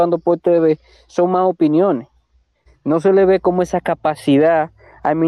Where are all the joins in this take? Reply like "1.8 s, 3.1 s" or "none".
2.7 s

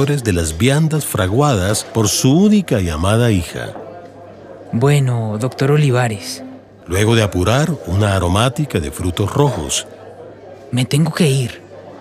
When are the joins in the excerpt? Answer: 6.8 s

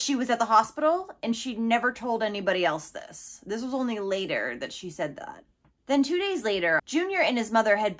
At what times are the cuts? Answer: 5.6 s, 6.8 s

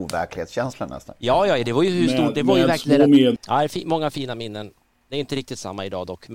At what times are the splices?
3.4 s

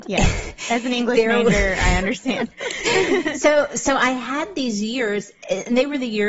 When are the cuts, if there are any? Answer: none

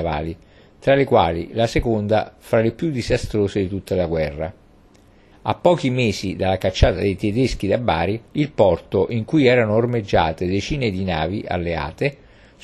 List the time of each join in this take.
5.3 s, 8.3 s

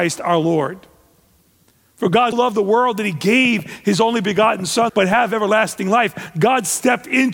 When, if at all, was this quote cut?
2.3 s, 4.9 s

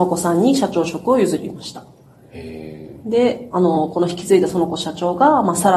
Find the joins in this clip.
none

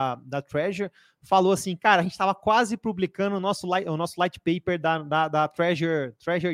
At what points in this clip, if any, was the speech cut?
none

